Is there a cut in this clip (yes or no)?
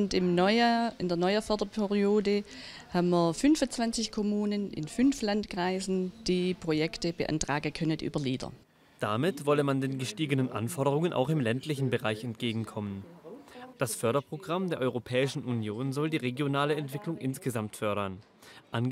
yes